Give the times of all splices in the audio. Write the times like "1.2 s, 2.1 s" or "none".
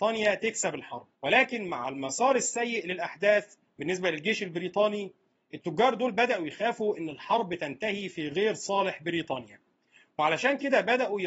1.1 s